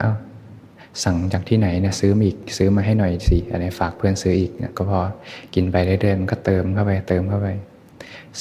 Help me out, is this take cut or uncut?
uncut